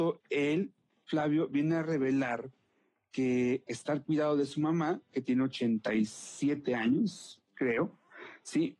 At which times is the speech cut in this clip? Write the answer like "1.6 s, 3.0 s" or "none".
5.1 s